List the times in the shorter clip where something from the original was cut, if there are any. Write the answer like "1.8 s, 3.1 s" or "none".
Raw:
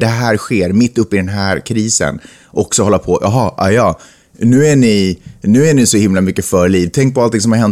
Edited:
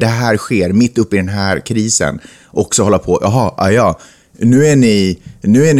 none